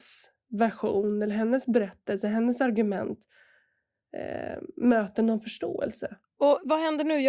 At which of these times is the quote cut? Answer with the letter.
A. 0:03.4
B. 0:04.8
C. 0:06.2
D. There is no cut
C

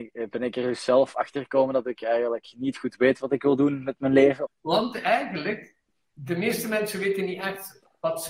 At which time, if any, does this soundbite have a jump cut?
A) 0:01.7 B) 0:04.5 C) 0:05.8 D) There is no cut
B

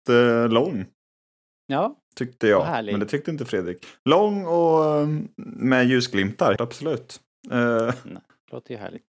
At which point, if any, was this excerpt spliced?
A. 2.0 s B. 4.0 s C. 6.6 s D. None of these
C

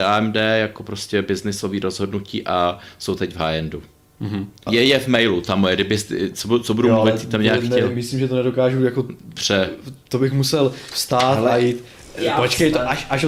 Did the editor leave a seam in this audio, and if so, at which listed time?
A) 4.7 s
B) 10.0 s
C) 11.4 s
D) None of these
A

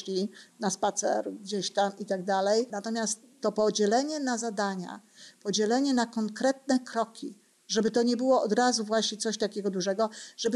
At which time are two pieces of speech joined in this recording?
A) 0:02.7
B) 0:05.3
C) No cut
A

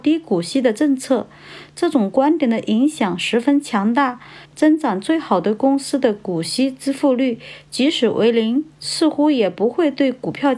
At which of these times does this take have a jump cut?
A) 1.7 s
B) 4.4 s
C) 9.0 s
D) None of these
B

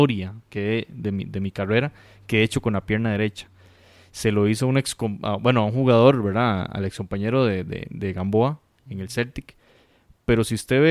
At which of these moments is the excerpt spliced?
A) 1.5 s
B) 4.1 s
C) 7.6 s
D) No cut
D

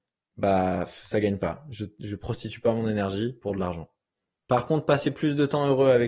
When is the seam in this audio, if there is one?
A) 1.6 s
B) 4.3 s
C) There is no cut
B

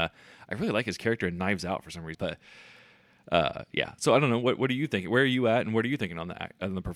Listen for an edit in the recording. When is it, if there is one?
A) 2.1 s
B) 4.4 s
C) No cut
A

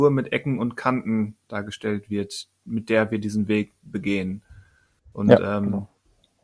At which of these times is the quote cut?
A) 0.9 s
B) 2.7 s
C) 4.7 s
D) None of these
D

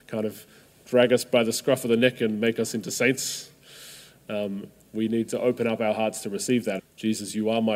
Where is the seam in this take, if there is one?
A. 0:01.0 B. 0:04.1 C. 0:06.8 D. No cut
C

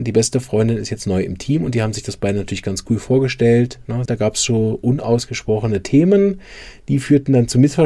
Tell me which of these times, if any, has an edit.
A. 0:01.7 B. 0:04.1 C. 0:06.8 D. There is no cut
B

